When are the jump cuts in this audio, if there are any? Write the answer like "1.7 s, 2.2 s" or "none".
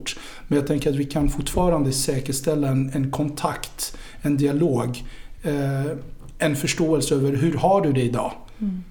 none

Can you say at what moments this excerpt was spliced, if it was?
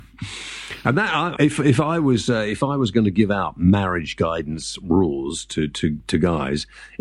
1.4 s

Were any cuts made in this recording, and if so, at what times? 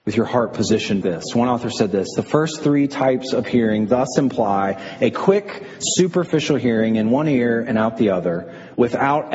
1.0 s

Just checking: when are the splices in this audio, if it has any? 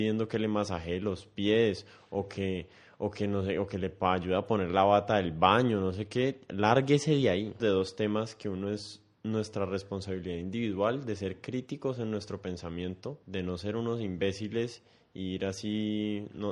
7.6 s, 13.2 s

